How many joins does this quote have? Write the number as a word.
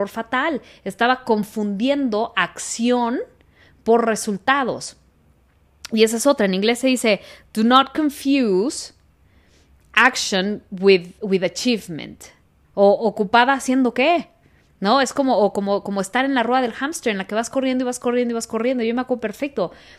one